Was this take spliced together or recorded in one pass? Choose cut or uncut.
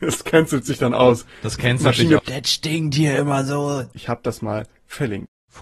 cut